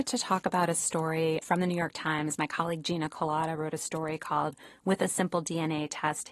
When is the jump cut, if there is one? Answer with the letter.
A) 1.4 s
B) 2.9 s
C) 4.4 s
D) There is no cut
A